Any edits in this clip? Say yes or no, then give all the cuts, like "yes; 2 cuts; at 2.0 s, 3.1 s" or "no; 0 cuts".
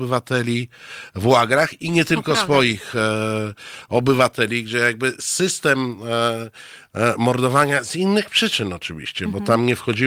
no; 0 cuts